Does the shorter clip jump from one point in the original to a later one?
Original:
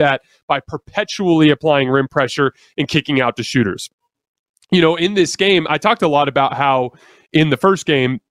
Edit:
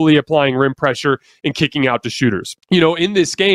yes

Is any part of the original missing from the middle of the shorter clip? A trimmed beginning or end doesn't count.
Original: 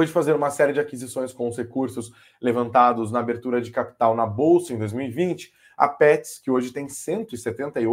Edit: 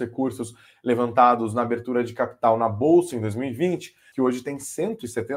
yes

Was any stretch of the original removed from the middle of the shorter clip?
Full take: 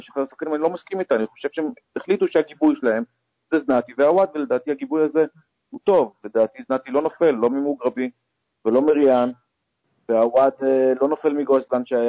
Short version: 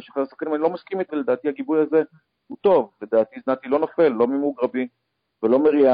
yes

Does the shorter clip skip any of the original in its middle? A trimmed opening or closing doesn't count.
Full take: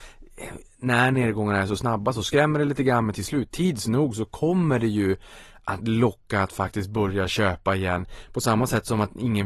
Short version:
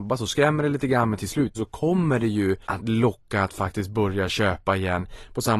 yes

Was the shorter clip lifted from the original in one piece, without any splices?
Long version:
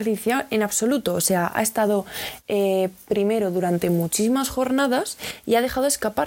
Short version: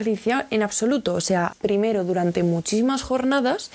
no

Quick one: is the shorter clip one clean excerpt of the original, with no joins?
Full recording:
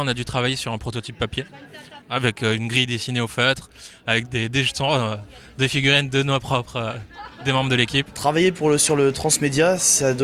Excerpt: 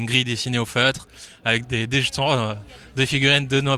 yes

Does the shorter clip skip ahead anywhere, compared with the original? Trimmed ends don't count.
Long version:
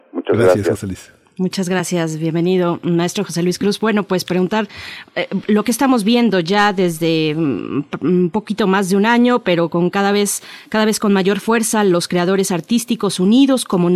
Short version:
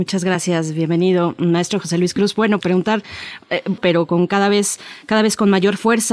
yes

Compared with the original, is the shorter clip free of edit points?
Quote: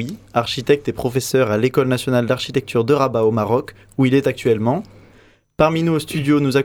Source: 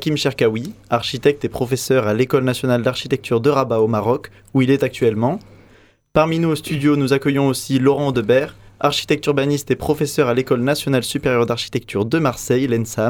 yes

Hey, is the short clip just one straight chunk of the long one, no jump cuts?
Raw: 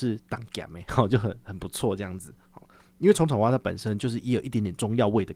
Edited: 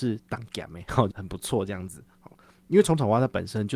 no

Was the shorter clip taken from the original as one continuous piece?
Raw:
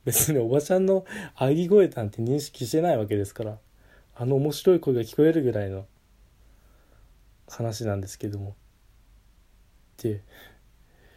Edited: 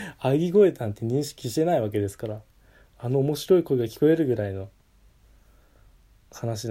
yes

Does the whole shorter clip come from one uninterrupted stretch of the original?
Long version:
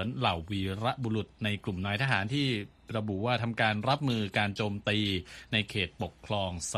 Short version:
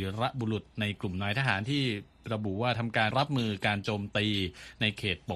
no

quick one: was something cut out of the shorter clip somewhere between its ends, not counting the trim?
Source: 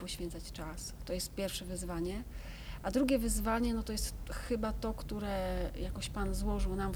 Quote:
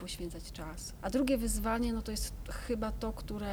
yes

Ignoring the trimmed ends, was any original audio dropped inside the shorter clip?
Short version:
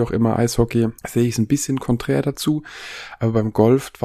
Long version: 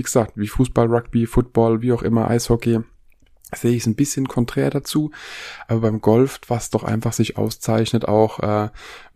yes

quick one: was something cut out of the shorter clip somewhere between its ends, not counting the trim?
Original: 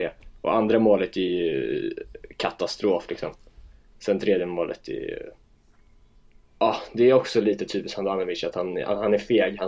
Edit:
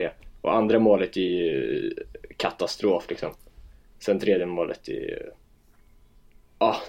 no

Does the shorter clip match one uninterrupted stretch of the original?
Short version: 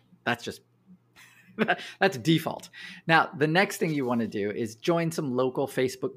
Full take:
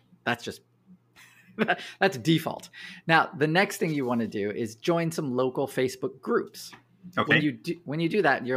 yes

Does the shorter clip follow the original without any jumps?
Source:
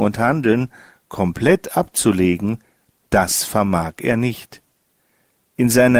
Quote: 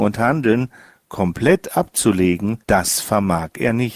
no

